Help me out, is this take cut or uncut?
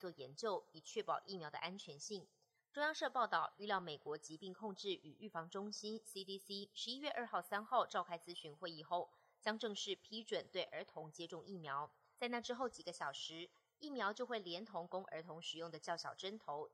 uncut